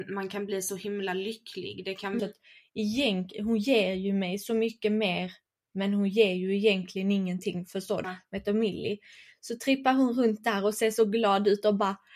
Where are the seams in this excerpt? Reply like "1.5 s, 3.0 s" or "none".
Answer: 2.2 s, 8.0 s